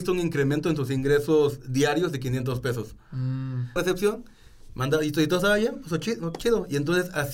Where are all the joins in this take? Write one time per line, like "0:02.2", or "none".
0:03.8

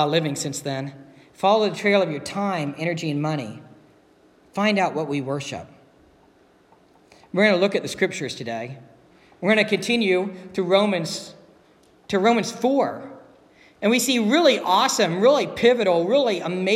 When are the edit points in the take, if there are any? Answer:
none

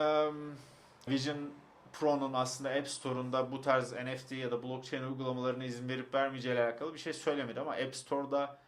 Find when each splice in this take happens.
0:01.1

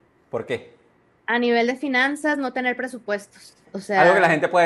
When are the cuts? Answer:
0:01.1
0:03.6

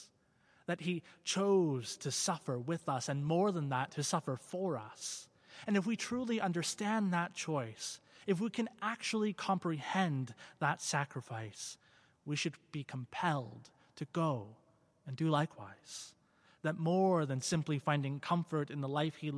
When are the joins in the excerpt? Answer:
none

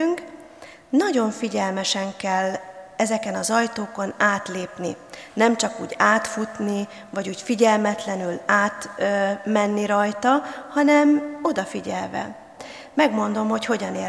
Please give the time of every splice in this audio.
none

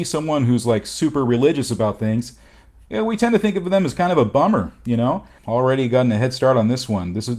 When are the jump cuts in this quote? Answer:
0:05.4

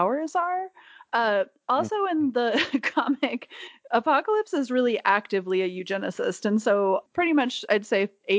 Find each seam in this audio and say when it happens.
0:07.1

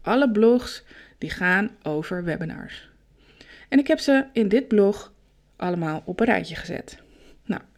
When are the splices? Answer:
0:03.6

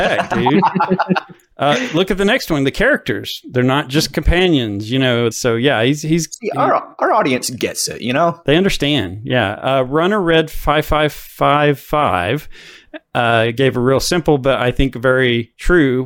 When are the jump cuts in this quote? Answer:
0:05.3

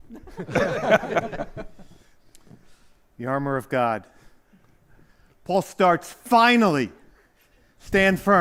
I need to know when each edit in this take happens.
none

